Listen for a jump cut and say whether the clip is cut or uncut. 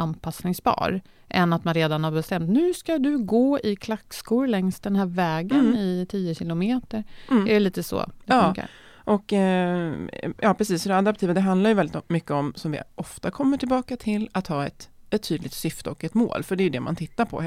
uncut